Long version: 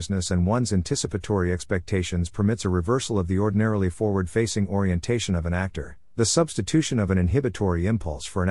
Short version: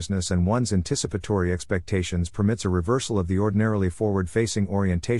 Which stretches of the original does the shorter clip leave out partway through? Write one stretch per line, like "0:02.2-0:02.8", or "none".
none